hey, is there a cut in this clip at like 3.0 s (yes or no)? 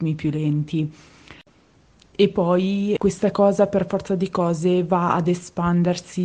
yes